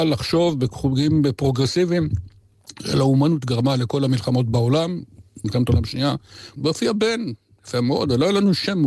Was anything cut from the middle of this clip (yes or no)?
yes